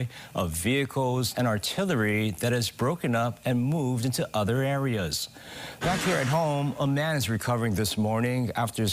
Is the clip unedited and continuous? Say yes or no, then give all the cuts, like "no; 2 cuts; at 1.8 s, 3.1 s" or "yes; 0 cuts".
no; 2 cuts; at 1.3 s, 5.8 s